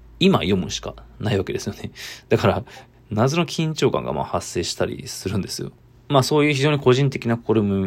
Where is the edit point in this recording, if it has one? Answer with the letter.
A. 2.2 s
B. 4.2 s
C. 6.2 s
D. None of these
D